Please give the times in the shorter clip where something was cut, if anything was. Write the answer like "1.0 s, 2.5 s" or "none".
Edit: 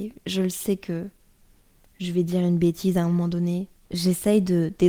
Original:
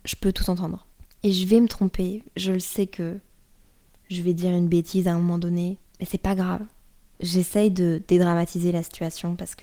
3.8 s